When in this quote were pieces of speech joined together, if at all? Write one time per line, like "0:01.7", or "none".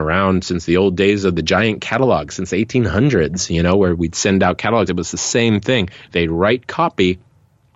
none